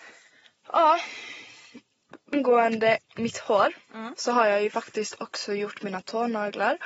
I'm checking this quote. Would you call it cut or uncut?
uncut